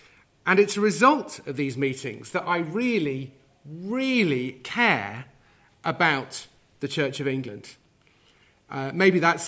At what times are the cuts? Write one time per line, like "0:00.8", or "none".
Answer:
none